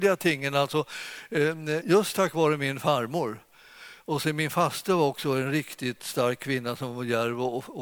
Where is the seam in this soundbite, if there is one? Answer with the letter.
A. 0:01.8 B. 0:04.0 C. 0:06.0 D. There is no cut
A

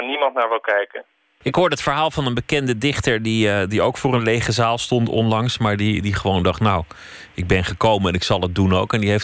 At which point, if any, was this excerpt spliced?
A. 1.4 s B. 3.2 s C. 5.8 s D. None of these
A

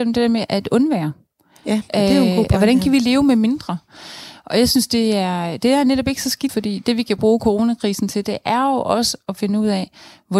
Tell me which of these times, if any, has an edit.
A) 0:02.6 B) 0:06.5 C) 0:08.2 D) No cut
B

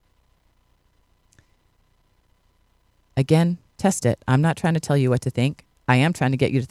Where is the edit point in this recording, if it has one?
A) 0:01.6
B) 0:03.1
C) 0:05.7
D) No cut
D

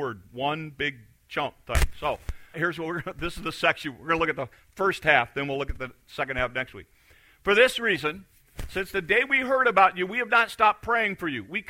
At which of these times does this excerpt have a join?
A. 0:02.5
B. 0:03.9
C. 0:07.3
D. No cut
A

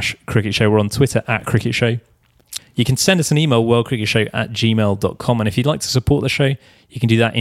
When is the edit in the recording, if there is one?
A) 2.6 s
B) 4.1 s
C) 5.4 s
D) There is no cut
A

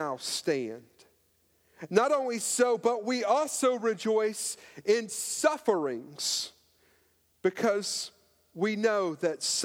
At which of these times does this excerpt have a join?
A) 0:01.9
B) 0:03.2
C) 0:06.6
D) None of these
A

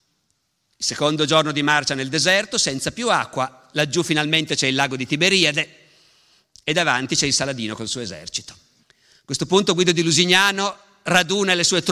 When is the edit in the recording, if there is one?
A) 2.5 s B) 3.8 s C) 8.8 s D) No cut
C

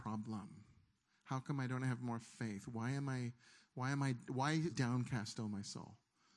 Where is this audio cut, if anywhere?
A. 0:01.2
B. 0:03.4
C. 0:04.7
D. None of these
C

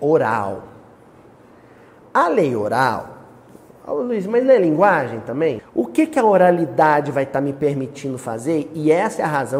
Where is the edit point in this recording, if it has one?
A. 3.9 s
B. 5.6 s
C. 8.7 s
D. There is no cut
B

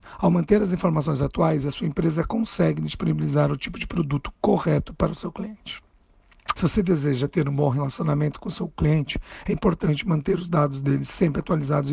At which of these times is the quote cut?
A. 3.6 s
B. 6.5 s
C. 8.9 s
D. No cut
B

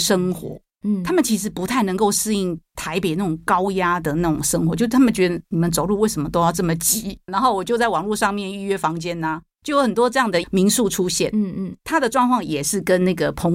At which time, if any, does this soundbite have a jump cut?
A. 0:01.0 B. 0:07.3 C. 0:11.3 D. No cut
B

